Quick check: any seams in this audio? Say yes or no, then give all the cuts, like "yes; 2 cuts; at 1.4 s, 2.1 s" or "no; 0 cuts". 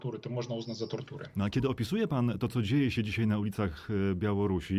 no; 0 cuts